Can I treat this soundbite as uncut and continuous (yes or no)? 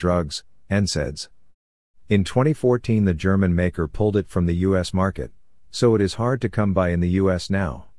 no